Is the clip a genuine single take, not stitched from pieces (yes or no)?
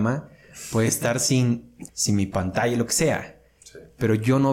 no